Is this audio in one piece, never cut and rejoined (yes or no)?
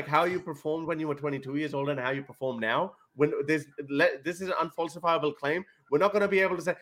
yes